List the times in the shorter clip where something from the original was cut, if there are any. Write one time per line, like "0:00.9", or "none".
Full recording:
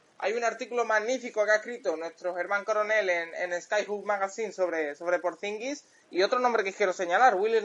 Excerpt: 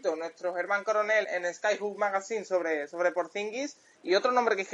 0:01.2